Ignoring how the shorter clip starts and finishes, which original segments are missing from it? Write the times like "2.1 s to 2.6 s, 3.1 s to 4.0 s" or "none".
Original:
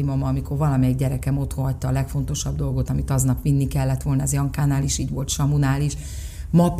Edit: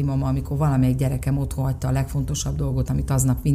none